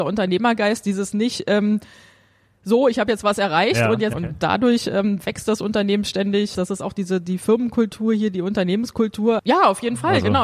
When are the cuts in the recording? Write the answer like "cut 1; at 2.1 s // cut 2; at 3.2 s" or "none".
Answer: cut 1; at 4.1 s // cut 2; at 6.5 s // cut 3; at 9.4 s